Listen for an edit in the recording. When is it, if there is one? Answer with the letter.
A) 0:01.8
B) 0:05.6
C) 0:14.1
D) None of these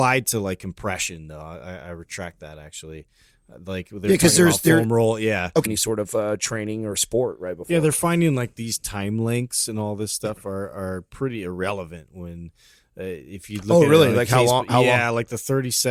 B